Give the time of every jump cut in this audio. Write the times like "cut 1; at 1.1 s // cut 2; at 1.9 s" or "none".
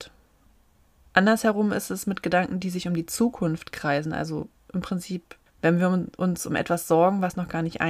cut 1; at 5.5 s

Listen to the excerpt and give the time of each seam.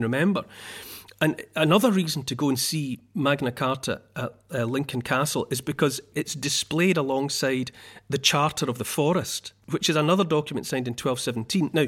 cut 1; at 9.6 s

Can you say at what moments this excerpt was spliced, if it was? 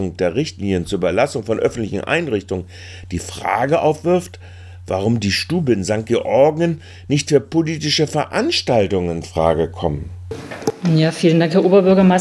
none

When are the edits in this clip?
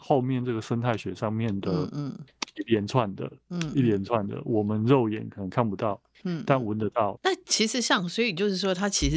cut 1; at 7.2 s

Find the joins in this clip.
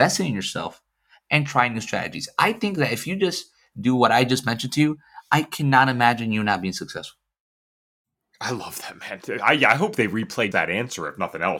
cut 1; at 10.5 s

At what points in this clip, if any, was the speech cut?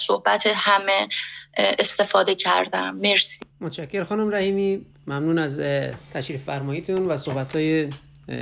cut 1; at 3.5 s

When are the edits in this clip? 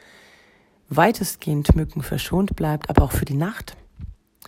none

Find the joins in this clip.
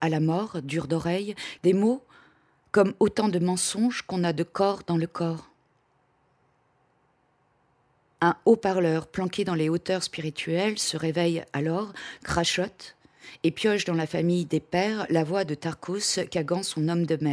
cut 1; at 1.6 s

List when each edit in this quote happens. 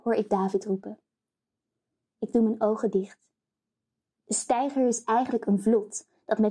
cut 1; at 2.1 s // cut 2; at 4.1 s

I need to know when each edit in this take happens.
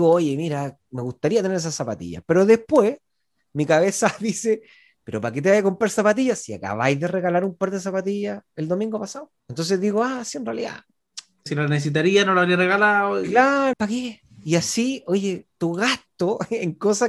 cut 1; at 9.4 s // cut 2; at 11.5 s // cut 3; at 13.7 s

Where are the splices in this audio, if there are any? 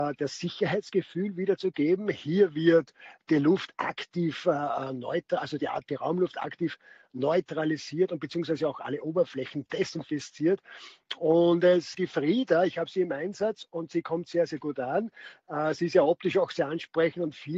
cut 1; at 11.9 s

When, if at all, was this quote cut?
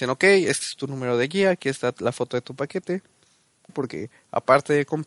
cut 1; at 3.7 s

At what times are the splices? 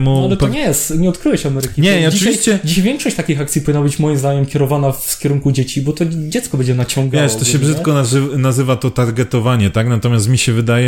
none

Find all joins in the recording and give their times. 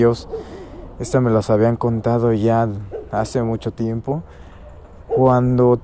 none

